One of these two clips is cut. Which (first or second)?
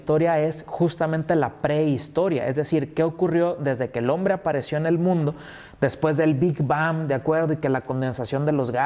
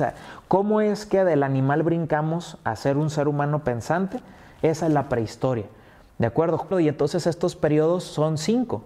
second